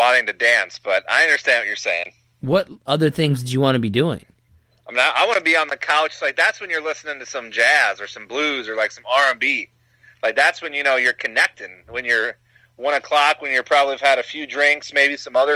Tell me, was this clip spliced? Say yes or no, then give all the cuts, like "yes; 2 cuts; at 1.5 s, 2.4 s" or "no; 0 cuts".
no; 0 cuts